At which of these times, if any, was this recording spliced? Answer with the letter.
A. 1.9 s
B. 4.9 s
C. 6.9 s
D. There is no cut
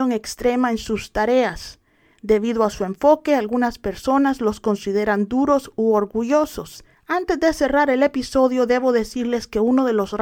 C